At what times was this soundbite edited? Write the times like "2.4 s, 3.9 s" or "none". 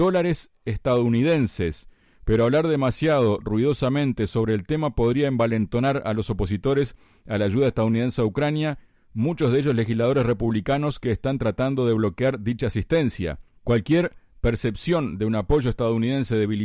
none